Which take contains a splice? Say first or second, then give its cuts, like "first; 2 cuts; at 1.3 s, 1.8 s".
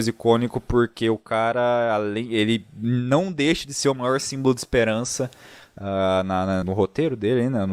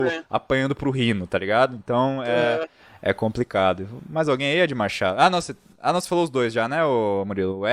first; 1 cut; at 6.6 s